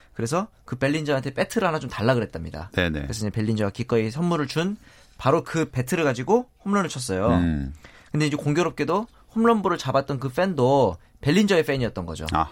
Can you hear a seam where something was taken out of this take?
no; 0 cuts

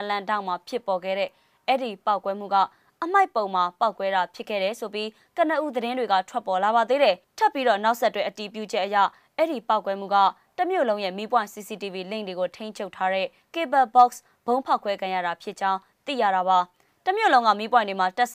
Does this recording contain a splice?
no; 0 cuts

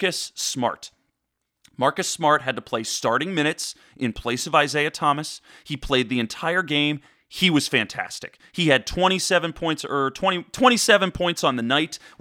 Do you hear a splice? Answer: no; 0 cuts

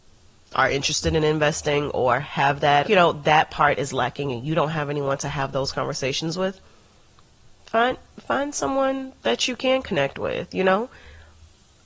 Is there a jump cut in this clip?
yes; 1 cut; at 2.8 s

